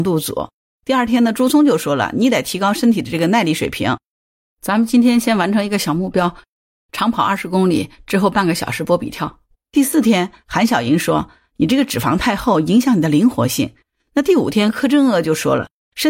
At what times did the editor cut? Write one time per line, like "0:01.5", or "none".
0:09.5
0:13.8